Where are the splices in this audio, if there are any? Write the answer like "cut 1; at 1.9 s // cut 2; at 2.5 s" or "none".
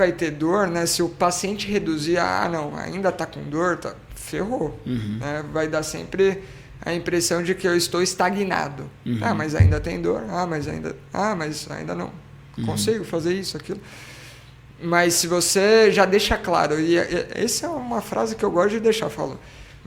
none